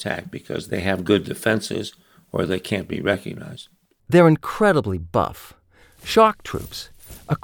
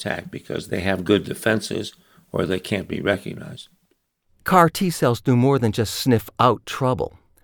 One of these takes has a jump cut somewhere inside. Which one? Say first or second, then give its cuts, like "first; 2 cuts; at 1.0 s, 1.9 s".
first; 2 cuts; at 4.0 s, 5.8 s